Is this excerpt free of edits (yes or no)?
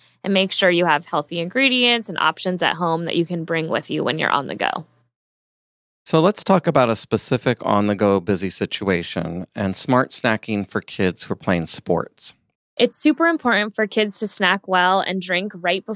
yes